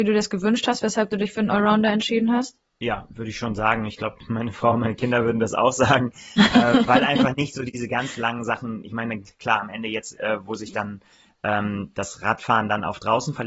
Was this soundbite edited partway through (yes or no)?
no